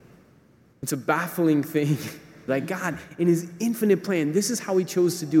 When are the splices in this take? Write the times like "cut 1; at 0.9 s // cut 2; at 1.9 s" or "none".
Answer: cut 1; at 2.5 s